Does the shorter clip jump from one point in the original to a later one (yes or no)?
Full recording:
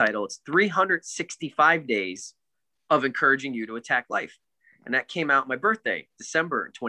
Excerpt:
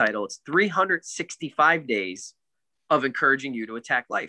no